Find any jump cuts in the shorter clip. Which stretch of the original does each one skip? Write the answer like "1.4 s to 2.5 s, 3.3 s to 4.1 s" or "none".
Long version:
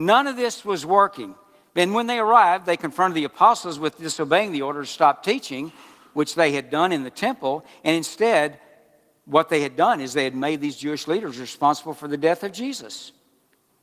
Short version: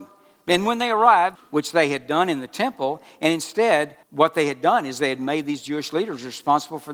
2.6 s to 6.0 s, 8.7 s to 9.2 s